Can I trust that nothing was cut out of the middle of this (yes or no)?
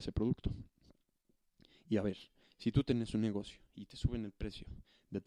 yes